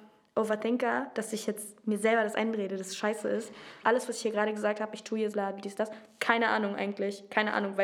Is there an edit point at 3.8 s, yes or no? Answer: yes